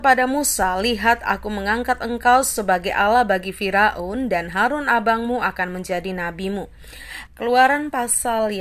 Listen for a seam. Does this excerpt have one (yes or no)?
yes